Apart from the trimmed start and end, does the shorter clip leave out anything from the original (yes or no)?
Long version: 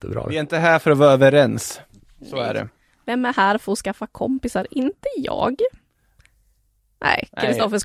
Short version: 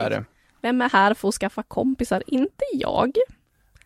no